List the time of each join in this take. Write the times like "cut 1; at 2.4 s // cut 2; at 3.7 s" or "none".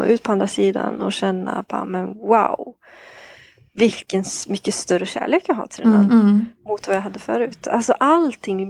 cut 1; at 6.1 s